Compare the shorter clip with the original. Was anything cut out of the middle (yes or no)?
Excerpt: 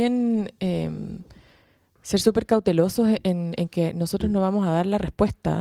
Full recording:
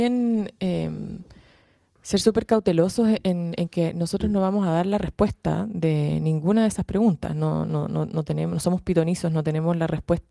no